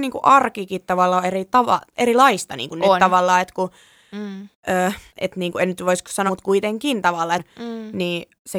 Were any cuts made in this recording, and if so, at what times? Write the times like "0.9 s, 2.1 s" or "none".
5.1 s, 6.3 s, 7.4 s